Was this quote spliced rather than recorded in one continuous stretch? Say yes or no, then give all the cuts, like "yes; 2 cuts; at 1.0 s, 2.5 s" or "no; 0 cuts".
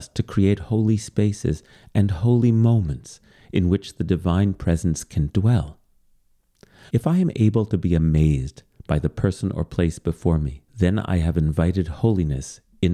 yes; 2 cuts; at 6.9 s, 10.7 s